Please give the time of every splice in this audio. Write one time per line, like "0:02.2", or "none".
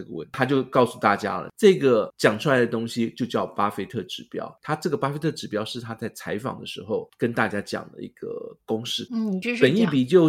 0:09.1